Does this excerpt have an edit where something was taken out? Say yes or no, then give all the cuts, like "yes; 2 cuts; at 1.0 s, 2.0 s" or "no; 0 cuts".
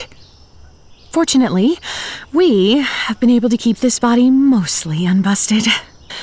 no; 0 cuts